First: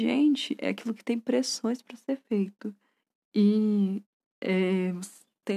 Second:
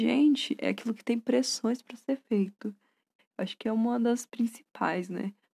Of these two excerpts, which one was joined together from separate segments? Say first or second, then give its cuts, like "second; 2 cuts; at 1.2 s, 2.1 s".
second; 1 cut; at 3.2 s